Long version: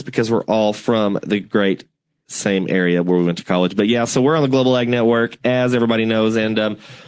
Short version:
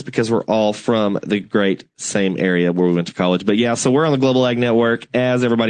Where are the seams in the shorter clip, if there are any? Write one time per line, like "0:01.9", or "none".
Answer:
0:01.9